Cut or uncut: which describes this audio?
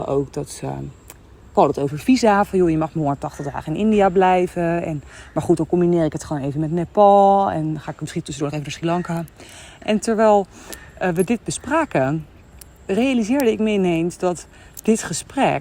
uncut